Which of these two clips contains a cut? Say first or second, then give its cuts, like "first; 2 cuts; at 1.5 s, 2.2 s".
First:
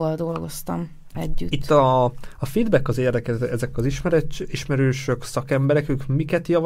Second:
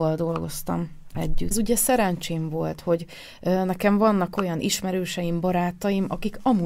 second; 1 cut; at 1.5 s